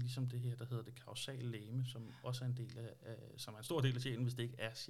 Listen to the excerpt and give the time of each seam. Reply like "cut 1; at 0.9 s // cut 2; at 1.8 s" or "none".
none